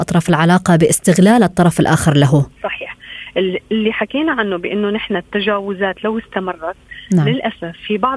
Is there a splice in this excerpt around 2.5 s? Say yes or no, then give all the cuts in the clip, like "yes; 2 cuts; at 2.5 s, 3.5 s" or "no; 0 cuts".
yes; 1 cut; at 2.5 s